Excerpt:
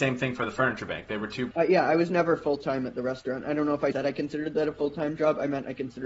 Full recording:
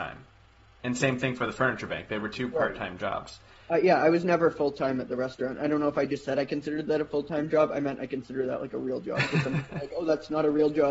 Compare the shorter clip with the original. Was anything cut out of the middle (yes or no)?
yes